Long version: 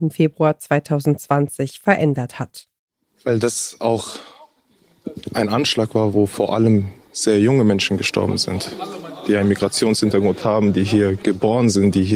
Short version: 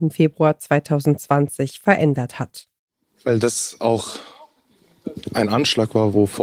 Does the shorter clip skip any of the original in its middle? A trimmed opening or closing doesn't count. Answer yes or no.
no